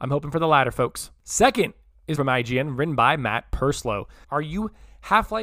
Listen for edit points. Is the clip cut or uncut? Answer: cut